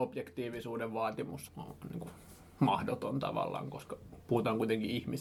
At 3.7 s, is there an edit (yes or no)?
no